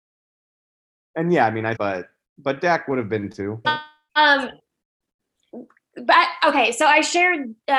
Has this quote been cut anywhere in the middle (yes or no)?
yes